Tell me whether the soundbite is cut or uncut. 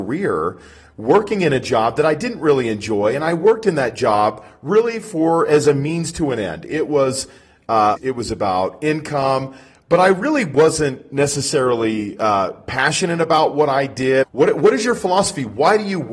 cut